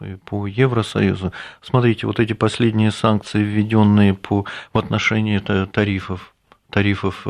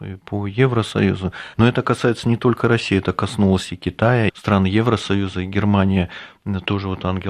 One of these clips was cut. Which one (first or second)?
second